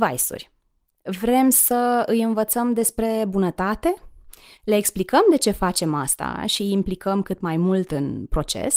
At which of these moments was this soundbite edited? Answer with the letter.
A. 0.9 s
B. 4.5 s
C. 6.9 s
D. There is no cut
B